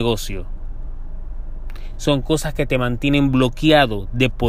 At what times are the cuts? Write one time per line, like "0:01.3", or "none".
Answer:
none